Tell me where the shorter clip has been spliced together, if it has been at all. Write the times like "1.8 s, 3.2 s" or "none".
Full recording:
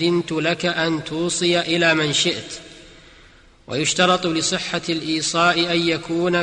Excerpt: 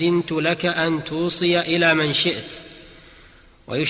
none